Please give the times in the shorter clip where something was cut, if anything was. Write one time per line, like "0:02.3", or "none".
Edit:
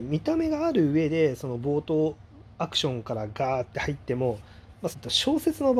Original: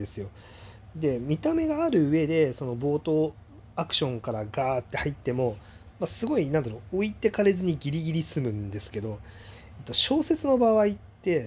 0:04.9